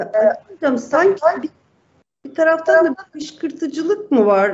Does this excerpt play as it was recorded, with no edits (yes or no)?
yes